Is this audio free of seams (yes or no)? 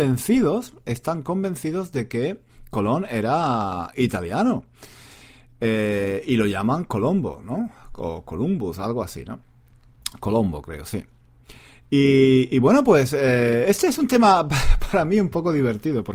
yes